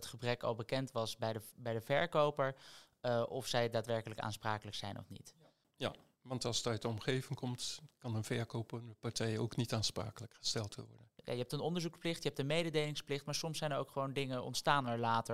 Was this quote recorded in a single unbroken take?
yes; 0 cuts

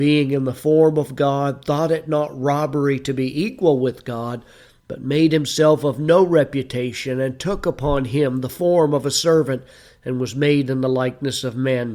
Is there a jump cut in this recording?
no; 0 cuts

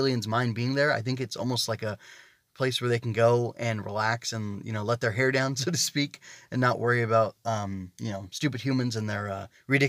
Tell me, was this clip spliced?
no; 0 cuts

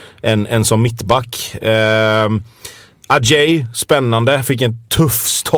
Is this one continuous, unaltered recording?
yes; 0 cuts

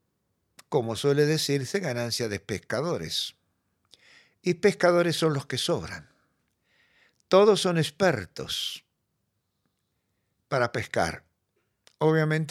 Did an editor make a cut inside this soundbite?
no; 0 cuts

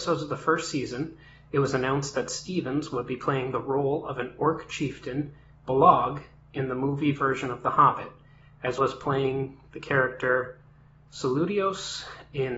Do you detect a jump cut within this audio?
yes; 1 cut; at 8.8 s

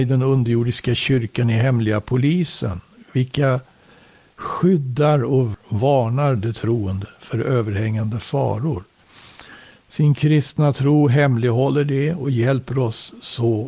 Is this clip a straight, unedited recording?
no; 1 cut; at 9.8 s

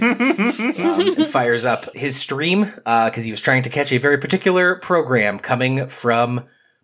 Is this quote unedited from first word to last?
no; 1 cut; at 1.9 s

